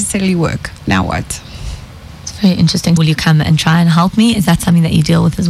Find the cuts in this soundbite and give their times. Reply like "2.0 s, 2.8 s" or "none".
3.0 s